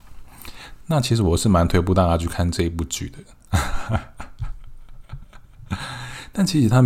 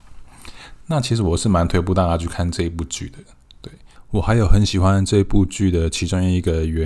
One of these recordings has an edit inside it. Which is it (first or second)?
first